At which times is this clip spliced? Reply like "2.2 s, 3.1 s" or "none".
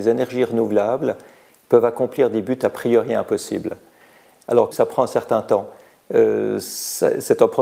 4.7 s